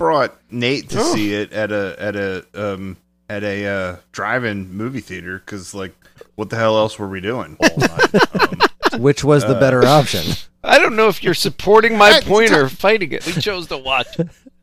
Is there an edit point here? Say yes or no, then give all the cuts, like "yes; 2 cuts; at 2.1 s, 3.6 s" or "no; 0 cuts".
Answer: yes; 3 cuts; at 7.6 s, 8.9 s, 13.2 s